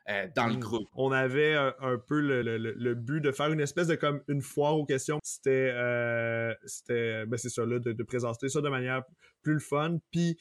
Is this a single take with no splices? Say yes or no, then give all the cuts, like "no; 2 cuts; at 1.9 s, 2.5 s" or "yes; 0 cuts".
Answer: no; 3 cuts; at 0.9 s, 2.4 s, 5.2 s